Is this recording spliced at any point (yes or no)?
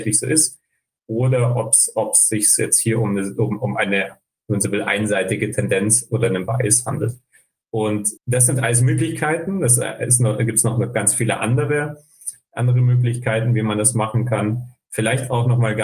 yes